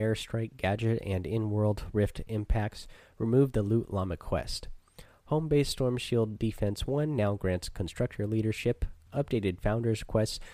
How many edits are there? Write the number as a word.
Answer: one